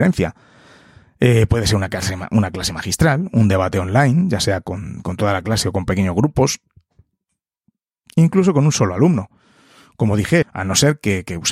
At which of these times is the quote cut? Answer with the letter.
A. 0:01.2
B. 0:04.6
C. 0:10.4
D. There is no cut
C